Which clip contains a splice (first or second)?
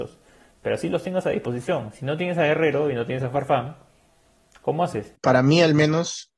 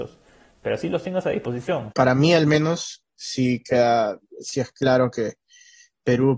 second